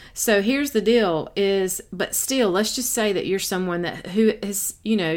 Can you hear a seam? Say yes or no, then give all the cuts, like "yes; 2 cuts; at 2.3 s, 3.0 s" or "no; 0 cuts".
no; 0 cuts